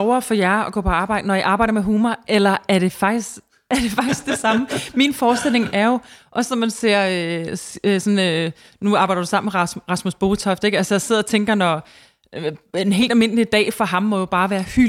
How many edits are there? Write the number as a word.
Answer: zero